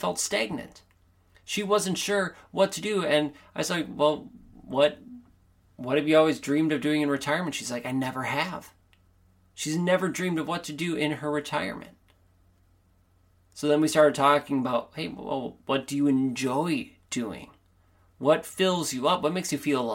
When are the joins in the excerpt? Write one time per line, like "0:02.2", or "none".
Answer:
none